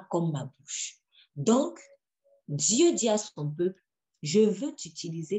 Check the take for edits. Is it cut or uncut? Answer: uncut